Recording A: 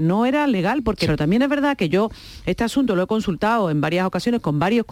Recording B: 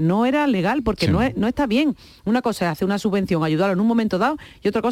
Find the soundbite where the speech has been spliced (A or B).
A